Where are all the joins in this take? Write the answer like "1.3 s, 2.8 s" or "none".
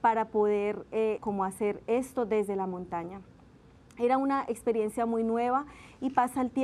1.2 s